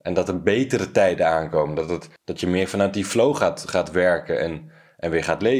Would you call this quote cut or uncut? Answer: uncut